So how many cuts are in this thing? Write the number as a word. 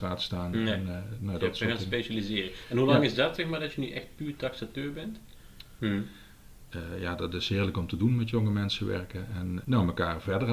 two